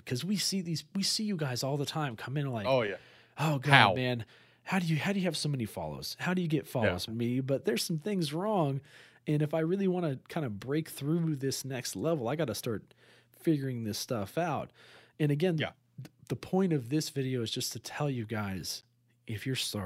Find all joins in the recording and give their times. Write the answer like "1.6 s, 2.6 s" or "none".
7.1 s